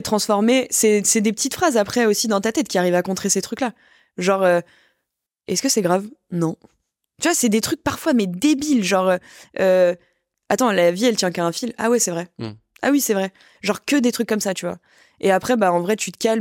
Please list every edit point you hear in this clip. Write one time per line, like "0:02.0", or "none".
none